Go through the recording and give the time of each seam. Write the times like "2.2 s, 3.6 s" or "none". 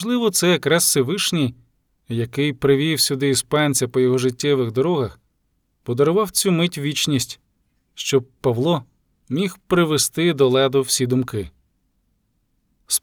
none